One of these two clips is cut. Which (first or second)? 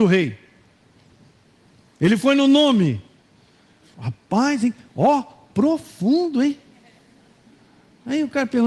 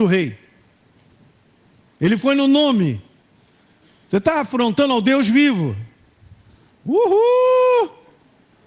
first